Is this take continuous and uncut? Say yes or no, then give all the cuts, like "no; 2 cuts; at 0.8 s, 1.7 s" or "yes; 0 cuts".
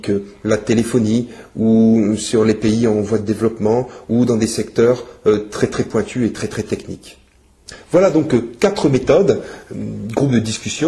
yes; 0 cuts